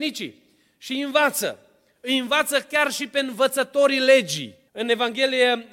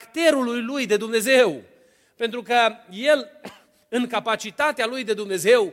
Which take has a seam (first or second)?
first